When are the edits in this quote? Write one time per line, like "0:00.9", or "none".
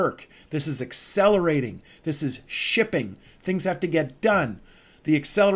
none